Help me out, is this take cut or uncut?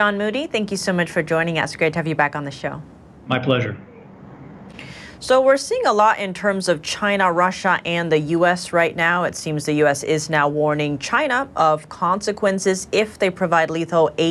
uncut